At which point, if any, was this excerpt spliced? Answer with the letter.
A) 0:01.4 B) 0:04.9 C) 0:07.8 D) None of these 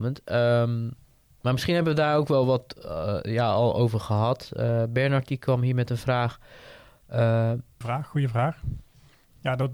C